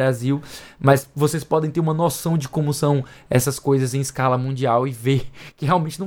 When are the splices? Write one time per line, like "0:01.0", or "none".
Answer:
none